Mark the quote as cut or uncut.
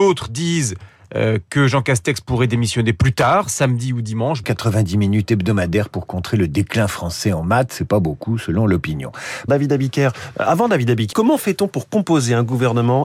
cut